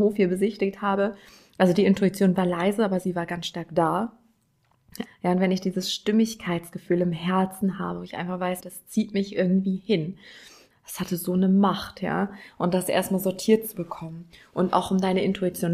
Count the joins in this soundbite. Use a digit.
3